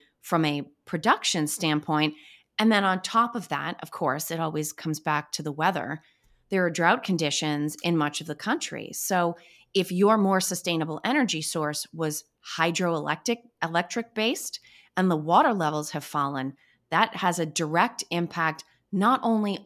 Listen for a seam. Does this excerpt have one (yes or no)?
no